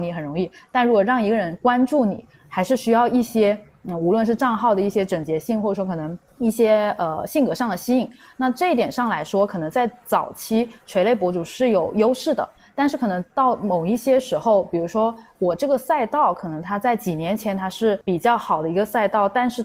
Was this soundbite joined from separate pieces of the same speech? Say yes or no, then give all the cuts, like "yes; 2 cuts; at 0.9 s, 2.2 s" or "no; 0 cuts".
no; 0 cuts